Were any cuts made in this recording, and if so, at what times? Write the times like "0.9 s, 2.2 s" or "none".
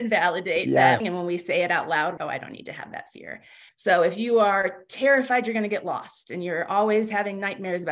1.0 s, 2.2 s, 3.7 s